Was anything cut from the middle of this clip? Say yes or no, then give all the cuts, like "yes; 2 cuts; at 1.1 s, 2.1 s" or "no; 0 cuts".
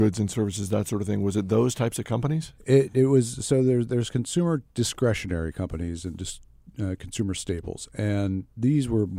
no; 0 cuts